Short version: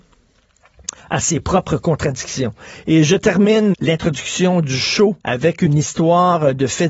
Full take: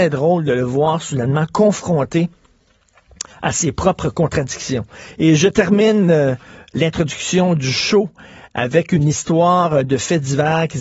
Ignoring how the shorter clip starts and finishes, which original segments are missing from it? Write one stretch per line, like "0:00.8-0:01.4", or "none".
0:06.0-0:06.7
0:08.1-0:08.5

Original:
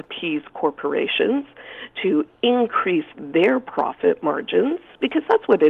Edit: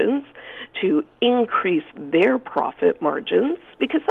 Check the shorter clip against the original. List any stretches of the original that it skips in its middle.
none

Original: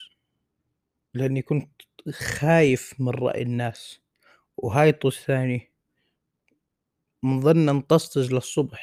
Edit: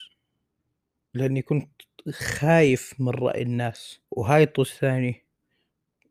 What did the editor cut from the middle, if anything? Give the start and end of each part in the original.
0:04.0-0:04.5

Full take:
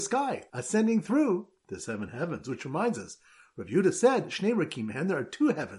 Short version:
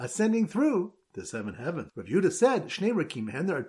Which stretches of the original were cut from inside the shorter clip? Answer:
0:02.4-0:03.5

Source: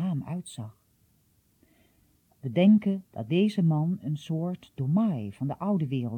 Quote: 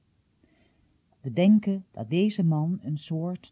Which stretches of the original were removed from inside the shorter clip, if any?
none

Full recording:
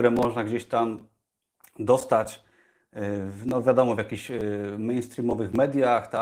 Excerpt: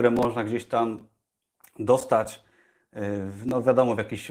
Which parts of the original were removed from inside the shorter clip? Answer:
none

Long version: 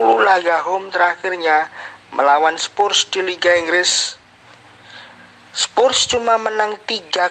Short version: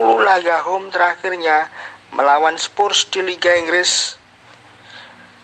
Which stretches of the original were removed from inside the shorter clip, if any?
none

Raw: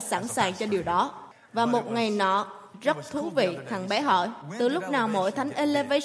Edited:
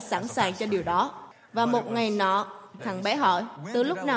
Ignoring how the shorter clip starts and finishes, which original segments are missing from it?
0:02.8-0:03.6

